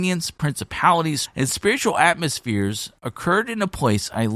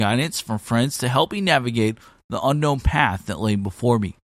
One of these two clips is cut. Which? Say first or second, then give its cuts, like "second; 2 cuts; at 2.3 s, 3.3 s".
first; 1 cut; at 1.2 s